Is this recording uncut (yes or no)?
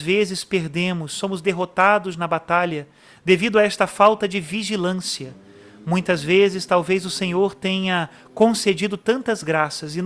yes